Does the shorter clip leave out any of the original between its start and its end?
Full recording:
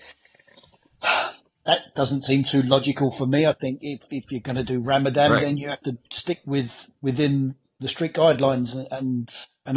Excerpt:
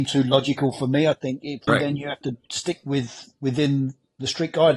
yes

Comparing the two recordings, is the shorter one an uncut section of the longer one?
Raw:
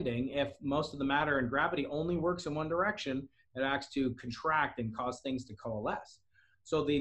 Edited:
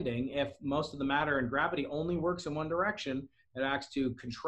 yes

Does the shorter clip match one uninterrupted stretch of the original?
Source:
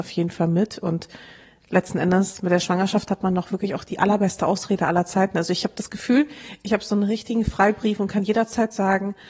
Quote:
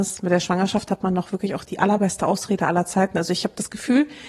yes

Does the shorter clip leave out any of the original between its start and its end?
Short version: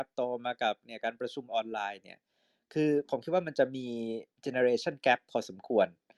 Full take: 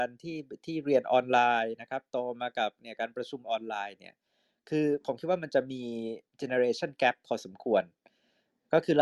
no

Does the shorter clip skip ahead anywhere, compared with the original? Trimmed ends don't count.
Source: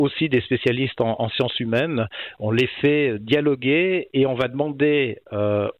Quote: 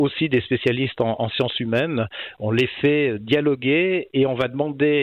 no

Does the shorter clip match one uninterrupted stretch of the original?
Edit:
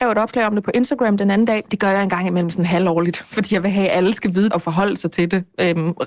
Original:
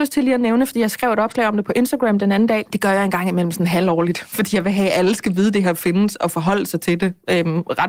no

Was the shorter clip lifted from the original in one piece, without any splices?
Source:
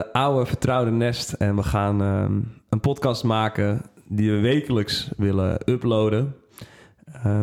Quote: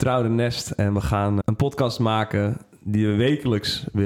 no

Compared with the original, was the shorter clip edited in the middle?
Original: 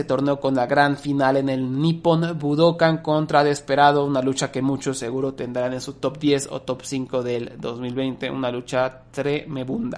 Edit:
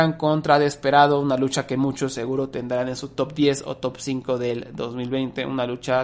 no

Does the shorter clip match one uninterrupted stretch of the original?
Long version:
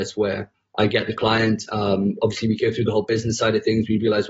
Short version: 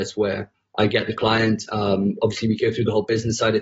yes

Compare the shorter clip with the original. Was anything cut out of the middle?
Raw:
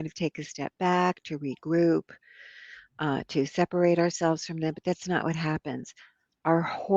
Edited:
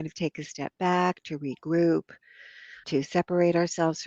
yes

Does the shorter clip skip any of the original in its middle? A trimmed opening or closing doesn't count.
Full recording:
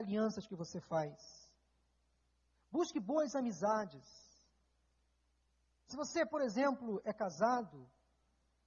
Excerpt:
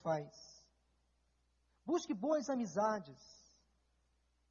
no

